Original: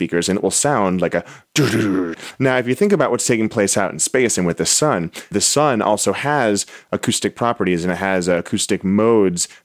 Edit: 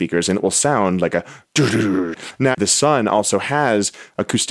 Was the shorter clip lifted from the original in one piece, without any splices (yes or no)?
no